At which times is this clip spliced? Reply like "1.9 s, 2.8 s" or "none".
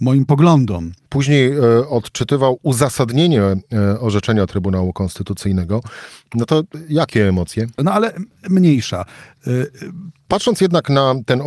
1.1 s, 7.8 s, 10.3 s